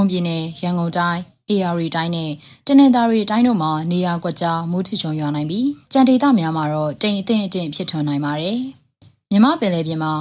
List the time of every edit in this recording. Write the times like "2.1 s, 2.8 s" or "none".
5.8 s

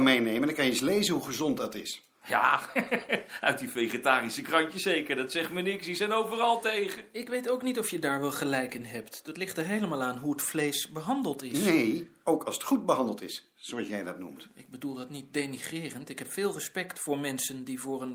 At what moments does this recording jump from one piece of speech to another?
none

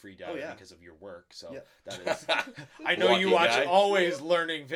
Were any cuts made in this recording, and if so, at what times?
none

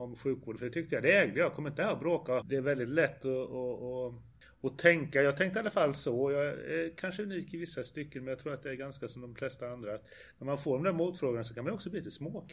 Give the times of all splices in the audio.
2.4 s

